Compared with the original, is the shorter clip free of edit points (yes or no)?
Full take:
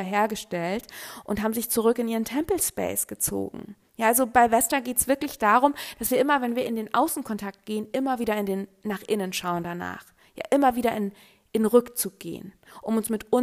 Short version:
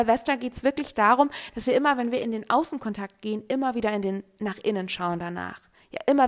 yes